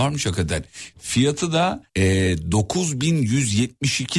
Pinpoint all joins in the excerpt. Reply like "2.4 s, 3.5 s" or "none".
1.9 s